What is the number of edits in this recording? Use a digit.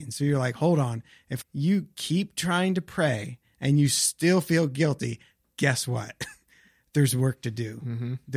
1